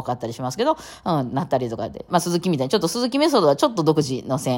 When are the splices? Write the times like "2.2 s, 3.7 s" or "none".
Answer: 2.1 s